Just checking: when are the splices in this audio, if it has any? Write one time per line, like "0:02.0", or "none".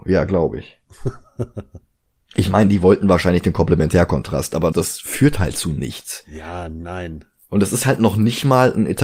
0:04.7